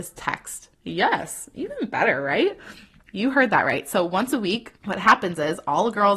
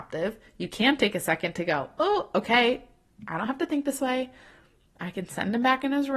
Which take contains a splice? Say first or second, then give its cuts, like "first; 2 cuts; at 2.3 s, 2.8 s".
first; 1 cut; at 4.8 s